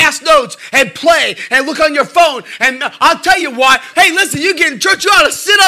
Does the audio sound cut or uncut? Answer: cut